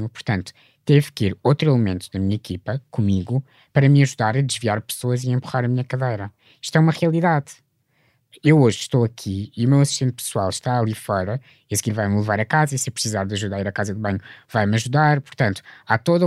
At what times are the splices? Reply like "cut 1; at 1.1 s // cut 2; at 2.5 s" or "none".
none